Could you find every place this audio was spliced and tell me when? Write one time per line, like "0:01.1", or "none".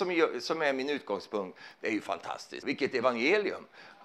0:02.6